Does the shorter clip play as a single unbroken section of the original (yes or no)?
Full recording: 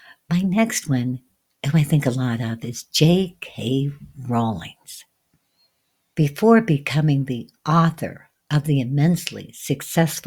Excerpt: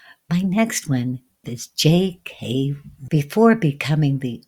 no